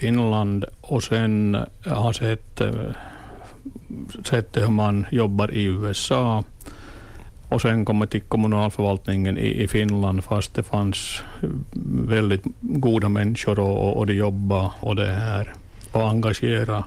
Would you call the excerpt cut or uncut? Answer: cut